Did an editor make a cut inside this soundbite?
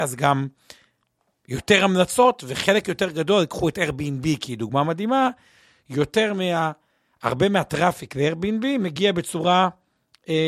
no; 0 cuts

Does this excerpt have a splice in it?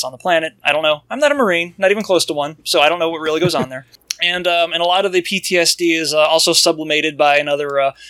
no; 0 cuts

